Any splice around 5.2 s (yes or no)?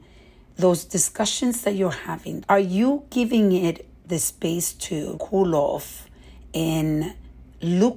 yes